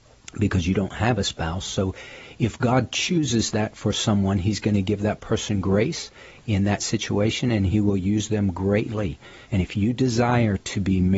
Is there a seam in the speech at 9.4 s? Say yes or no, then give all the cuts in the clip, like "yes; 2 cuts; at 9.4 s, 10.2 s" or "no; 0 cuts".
yes; 1 cut; at 9.4 s